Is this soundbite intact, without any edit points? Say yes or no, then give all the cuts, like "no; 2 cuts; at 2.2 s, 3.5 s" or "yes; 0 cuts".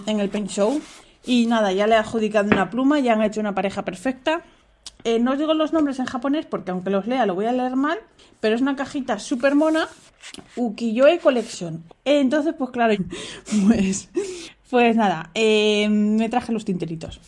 no; 3 cuts; at 5.0 s, 11.9 s, 12.9 s